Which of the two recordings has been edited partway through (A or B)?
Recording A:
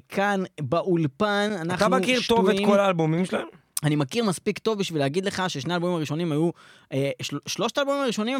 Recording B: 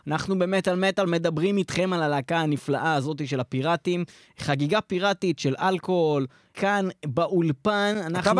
B